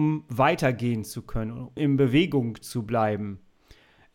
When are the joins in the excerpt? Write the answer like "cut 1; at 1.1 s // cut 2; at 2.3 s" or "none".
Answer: cut 1; at 1.8 s